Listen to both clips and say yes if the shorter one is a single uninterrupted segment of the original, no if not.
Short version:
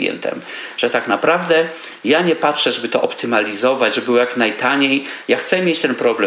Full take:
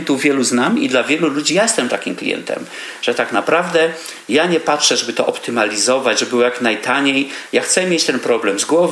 yes